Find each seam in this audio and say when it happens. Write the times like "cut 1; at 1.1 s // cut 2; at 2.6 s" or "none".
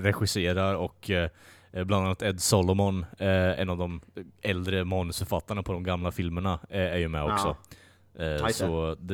none